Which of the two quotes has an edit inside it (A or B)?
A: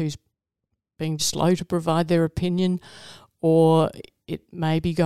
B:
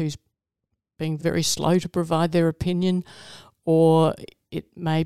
A